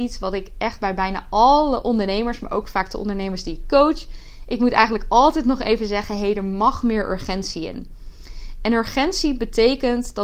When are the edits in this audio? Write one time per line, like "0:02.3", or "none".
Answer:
none